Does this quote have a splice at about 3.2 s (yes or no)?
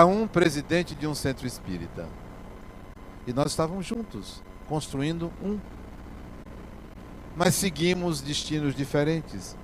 no